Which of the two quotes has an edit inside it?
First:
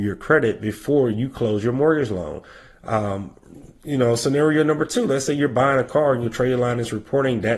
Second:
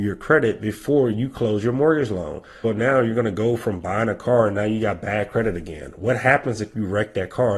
second; 1 cut; at 2.6 s

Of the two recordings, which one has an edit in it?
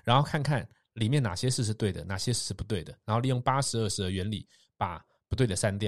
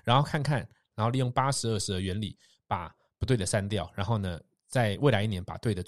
second; 1 cut; at 0.9 s

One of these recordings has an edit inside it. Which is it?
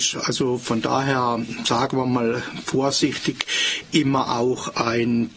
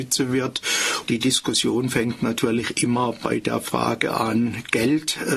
second; 1 cut; at 1.1 s

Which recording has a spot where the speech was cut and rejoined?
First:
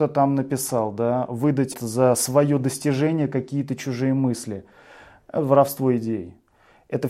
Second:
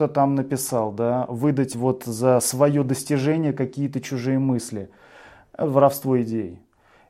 first; 1 cut; at 1.7 s

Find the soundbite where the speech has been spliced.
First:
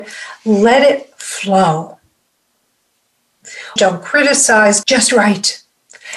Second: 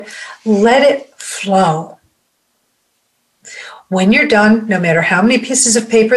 first; 2 cuts; at 3.8 s, 4.8 s

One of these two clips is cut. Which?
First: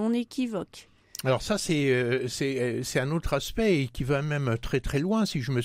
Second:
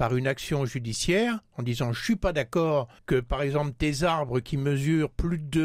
second; 1 cut; at 3.0 s

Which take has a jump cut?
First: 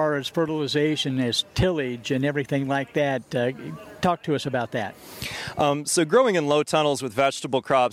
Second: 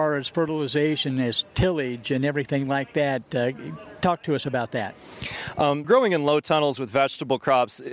second; 1 cut; at 5.8 s

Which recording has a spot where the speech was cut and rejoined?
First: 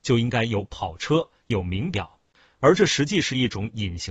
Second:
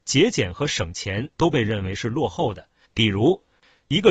second; 1 cut; at 2.8 s

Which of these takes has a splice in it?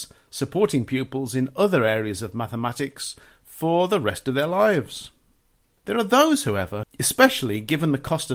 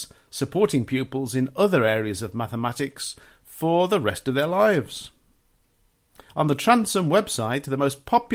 first; 2 cuts; at 5.8 s, 6.8 s

